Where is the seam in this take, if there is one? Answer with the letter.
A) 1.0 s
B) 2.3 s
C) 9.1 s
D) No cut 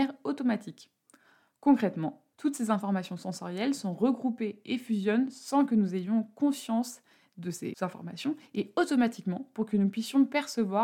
B